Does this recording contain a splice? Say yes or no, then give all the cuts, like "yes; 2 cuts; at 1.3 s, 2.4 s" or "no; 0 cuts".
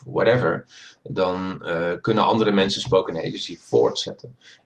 no; 0 cuts